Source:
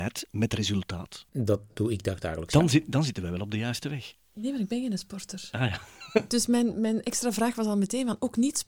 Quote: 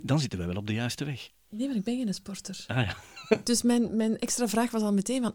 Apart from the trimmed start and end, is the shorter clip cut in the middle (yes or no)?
no